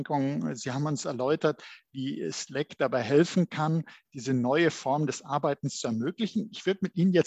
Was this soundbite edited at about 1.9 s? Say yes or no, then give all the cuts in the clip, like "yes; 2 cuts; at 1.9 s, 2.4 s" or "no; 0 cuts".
no; 0 cuts